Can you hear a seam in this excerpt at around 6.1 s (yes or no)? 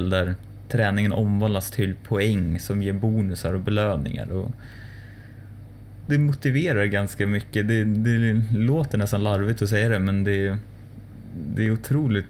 yes